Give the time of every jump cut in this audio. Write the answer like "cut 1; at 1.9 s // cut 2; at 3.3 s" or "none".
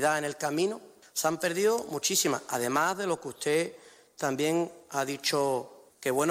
none